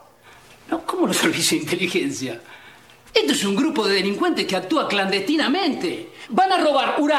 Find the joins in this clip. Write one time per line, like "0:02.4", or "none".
none